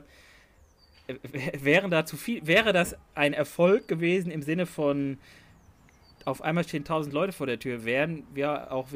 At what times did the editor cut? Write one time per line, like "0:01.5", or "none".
none